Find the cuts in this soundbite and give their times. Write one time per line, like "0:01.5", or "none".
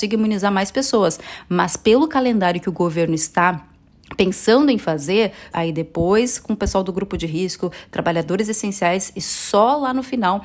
0:05.5